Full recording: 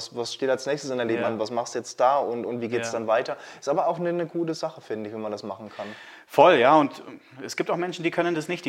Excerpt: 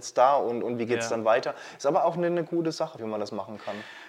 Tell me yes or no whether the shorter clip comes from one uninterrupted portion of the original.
no